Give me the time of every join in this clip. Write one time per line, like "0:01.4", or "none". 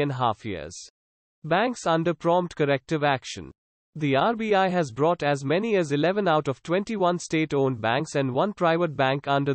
0:01.2